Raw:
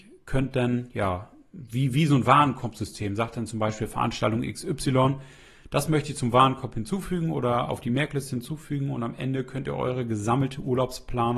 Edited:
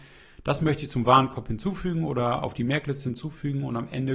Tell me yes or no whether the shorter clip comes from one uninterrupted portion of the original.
yes